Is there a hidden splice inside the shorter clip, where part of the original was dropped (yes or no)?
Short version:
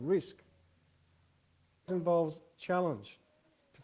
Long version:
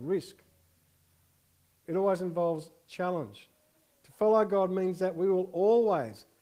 yes